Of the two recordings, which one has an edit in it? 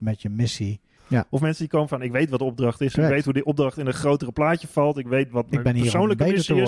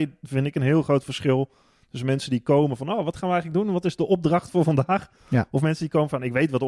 first; 1 cut; at 1.0 s

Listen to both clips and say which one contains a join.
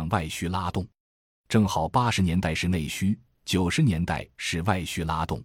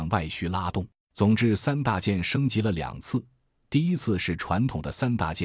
second; 1 cut; at 1.0 s

